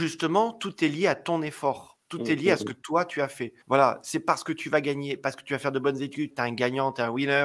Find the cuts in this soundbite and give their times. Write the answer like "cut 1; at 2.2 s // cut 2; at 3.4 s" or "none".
cut 1; at 3.6 s // cut 2; at 6.3 s